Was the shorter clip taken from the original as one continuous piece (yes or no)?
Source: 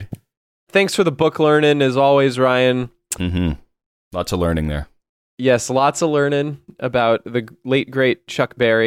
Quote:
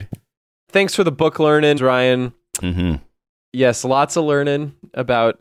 no